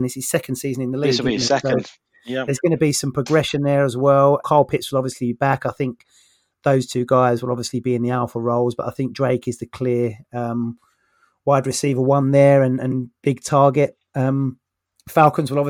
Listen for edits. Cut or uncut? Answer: cut